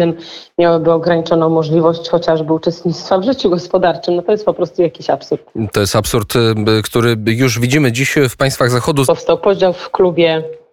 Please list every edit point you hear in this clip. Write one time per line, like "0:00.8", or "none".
0:09.0